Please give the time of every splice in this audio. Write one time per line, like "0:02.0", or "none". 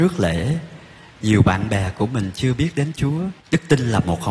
0:03.4